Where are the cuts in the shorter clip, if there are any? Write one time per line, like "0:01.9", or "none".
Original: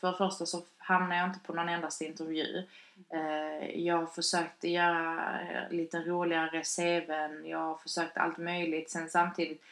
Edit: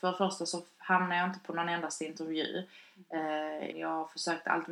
0:03.7